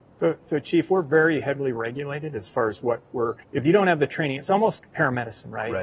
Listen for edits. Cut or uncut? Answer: cut